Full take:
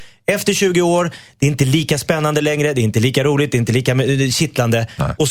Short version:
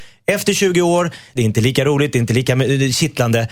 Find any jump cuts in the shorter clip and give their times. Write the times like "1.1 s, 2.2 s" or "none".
1.4 s